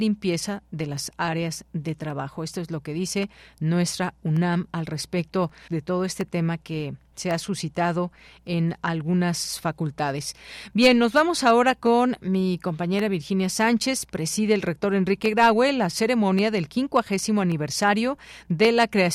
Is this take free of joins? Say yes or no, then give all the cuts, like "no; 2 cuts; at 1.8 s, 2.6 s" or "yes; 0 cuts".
no; 1 cut; at 5.7 s